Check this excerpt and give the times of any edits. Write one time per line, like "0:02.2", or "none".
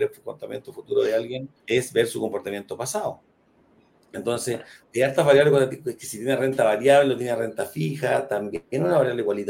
0:01.6